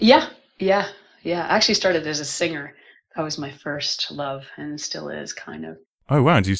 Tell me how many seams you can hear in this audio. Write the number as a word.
zero